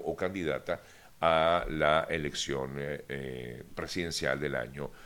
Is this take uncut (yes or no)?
yes